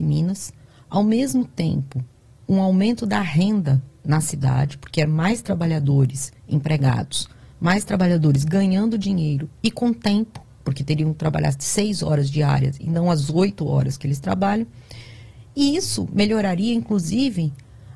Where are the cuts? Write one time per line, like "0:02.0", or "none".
none